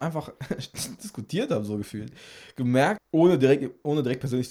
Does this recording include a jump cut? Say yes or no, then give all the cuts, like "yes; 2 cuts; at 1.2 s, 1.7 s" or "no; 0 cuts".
yes; 1 cut; at 3.0 s